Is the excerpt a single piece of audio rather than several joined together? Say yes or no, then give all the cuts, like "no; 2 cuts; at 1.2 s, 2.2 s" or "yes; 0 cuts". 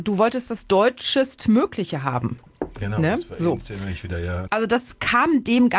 no; 1 cut; at 4.5 s